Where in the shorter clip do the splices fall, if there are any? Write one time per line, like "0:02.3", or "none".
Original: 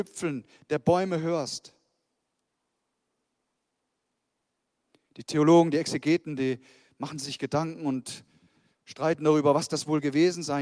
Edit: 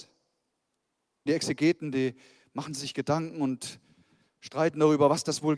0:01.3